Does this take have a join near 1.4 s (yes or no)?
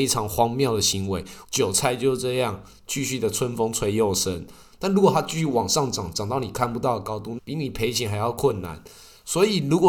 yes